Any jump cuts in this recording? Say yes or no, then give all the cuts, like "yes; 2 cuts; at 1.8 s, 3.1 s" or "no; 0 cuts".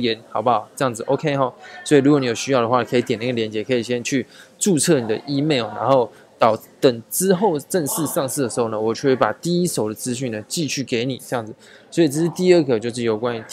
no; 0 cuts